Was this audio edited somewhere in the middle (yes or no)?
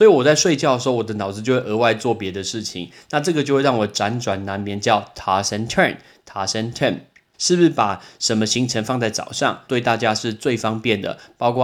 yes